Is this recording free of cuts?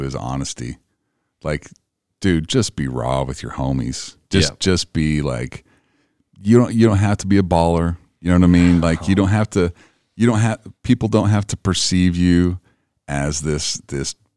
yes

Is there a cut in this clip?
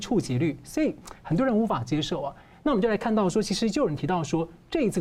no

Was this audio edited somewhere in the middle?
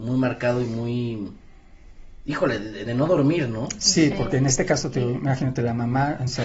yes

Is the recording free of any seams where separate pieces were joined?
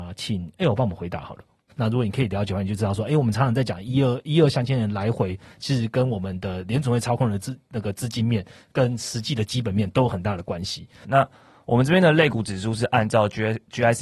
no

